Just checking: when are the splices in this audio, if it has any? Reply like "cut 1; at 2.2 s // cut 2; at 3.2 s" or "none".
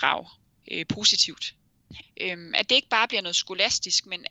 cut 1; at 2.0 s